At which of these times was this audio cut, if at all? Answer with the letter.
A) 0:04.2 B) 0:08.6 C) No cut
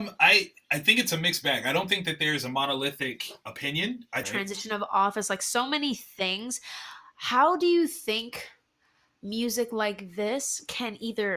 A